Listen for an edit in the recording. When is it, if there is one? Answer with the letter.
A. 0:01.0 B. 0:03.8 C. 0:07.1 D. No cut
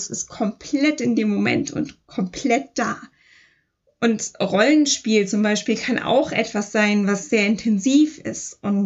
D